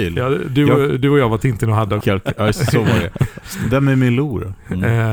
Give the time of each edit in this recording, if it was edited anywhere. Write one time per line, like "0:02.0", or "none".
0:02.0

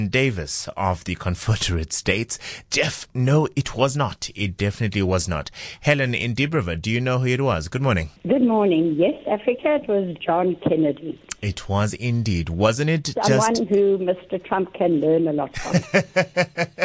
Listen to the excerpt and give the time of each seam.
0:08.2

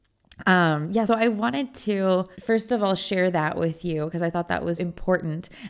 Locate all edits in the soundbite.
0:01.1
0:02.3
0:04.8

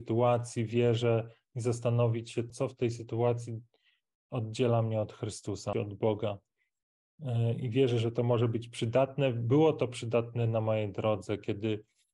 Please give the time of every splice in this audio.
0:02.5
0:05.7

